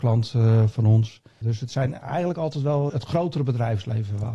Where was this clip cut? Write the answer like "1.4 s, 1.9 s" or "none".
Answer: 1.4 s, 2.9 s